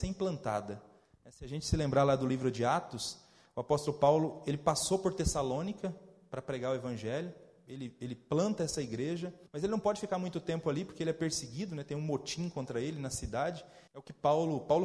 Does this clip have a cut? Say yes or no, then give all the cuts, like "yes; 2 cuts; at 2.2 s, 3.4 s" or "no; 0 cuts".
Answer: yes; 2 cuts; at 9.5 s, 13.9 s